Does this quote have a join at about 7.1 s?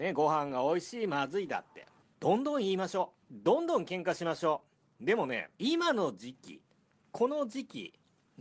no; 3 cuts; at 2.0 s, 3.2 s, 5.5 s

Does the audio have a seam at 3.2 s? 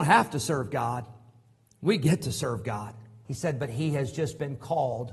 yes; 1 cut; at 3.2 s

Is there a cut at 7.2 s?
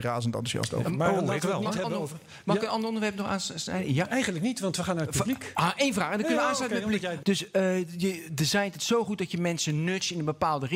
yes; 2 cuts; at 5.8 s, 7.2 s

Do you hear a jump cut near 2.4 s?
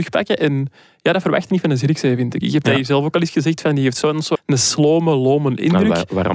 yes; 2 cuts; at 2.4 s, 4.4 s

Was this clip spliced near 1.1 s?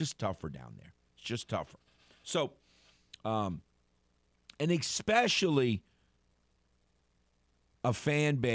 no; 0 cuts

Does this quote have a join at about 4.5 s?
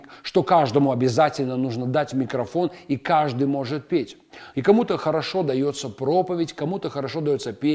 yes; 1 cut; at 4.5 s

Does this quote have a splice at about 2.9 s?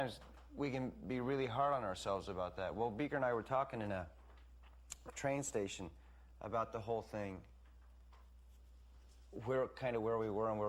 no; 1 cut; at 5.1 s

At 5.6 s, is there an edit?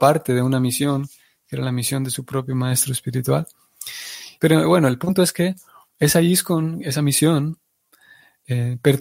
no; 1 cut; at 4.4 s

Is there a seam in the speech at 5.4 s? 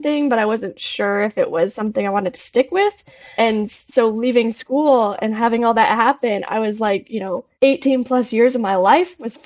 no; 2 cuts; at 3.4 s, 7.5 s

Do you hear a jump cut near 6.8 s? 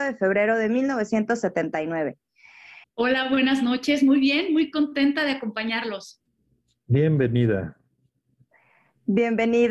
no; 1 cut; at 2.8 s

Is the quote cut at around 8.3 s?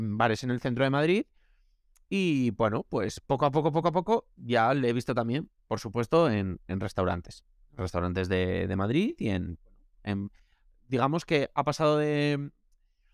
no; 0 cuts

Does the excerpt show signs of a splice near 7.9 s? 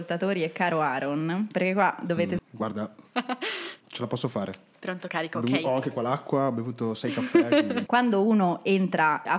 yes; 2 cuts; at 2.4 s, 7.9 s

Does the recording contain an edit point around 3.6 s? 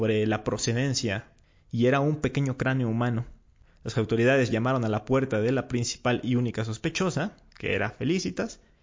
yes; 1 cut; at 3.6 s

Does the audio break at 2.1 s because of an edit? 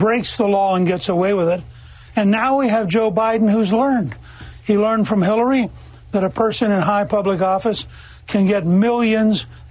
no; 1 cut; at 4.6 s

